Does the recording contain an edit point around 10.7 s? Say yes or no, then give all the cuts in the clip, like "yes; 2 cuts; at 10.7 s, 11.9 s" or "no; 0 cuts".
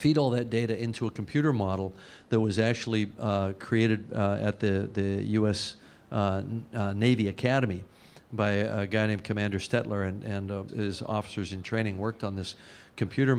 yes; 1 cut; at 10.7 s